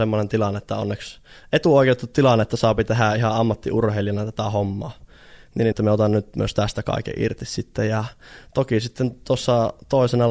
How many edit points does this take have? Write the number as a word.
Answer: one